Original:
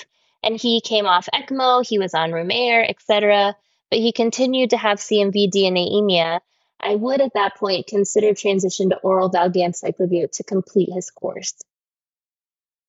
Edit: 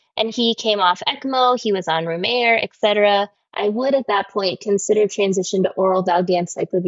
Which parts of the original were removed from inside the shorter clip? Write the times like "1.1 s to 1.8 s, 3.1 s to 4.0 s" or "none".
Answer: 3.6 s to 6.6 s